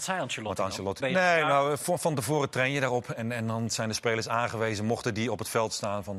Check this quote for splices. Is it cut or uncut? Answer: cut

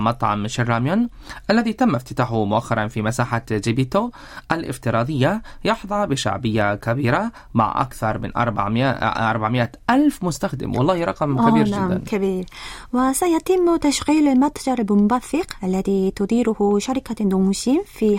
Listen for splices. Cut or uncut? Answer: uncut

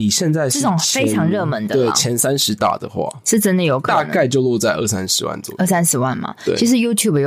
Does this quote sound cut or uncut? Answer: uncut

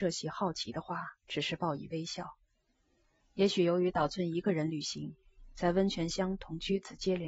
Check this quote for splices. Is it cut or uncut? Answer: cut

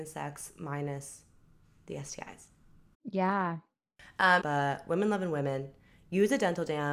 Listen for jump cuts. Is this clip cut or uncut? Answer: cut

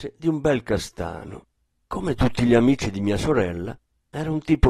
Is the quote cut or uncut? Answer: cut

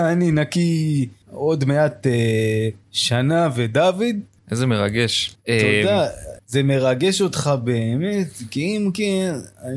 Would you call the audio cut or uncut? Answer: uncut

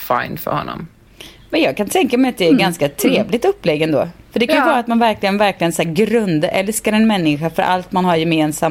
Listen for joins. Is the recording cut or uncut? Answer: uncut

